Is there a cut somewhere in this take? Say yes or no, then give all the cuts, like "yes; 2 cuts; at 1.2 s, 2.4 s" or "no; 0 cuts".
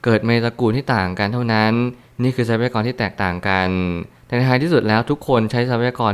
no; 0 cuts